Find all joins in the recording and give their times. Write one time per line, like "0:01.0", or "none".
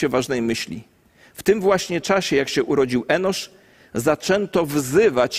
none